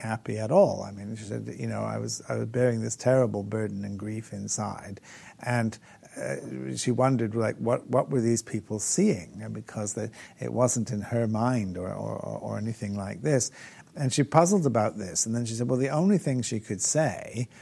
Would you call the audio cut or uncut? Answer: uncut